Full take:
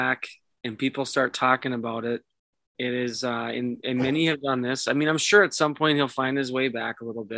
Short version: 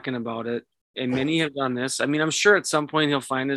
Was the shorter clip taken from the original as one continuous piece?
no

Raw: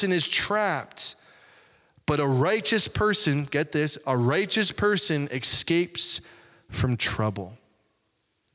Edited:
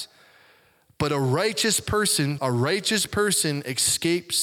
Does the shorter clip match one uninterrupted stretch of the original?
no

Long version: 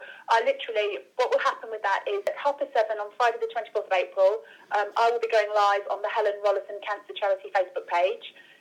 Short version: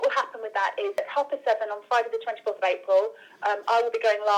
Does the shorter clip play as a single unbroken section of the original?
yes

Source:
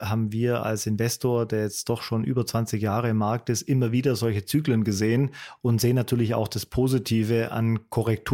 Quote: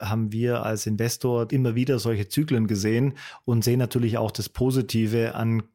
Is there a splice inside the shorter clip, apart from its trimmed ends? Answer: yes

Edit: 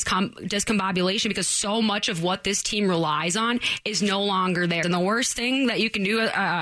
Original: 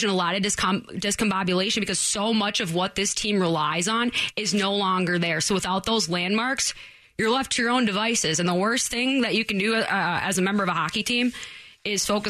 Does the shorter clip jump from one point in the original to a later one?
yes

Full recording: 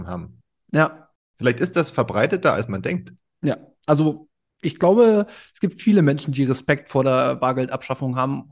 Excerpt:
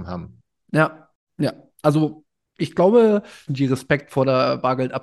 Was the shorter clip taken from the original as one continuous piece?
no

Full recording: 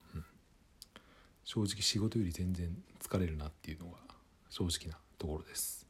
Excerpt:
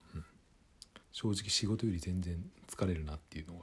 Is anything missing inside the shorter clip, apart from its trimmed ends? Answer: yes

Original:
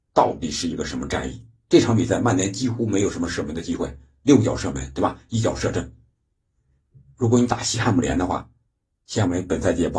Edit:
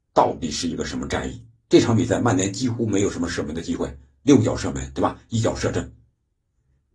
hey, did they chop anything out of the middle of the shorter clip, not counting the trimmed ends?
no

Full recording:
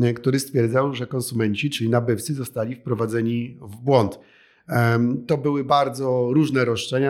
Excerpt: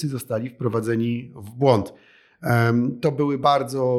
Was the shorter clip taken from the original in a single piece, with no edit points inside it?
yes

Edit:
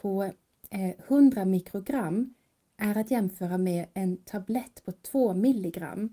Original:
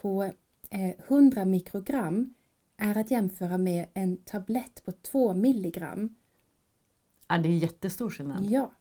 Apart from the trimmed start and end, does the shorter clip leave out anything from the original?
no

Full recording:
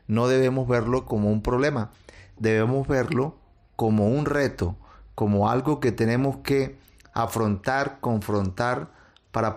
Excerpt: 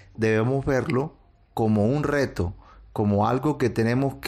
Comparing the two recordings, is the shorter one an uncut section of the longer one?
yes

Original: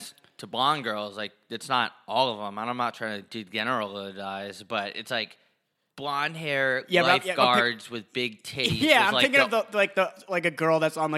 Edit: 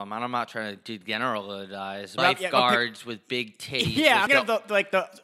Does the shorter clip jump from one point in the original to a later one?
yes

